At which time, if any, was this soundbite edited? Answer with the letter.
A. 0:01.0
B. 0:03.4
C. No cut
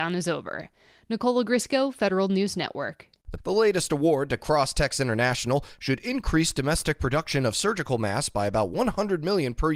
B